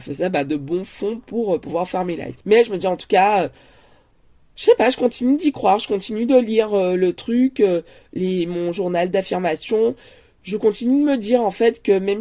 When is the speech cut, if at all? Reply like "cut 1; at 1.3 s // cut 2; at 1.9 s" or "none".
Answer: cut 1; at 2.4 s